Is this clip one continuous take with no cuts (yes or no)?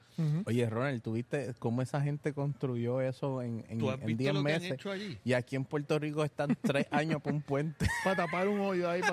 yes